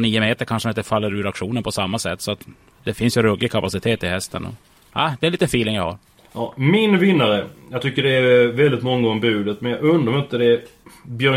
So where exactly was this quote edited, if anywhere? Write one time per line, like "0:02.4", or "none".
none